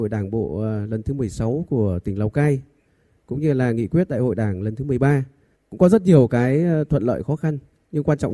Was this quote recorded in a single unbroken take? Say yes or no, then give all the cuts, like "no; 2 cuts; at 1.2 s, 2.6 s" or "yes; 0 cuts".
no; 1 cut; at 5.5 s